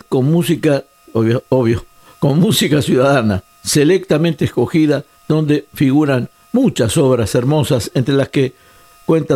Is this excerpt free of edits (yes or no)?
no